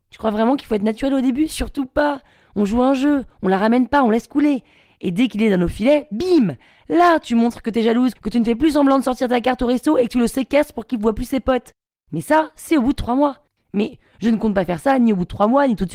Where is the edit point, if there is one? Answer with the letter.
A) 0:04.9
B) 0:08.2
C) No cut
B